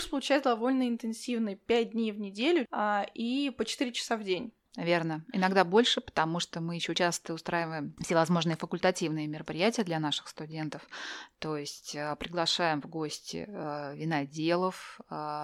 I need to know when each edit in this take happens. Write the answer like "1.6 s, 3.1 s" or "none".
2.7 s, 4.7 s, 6.9 s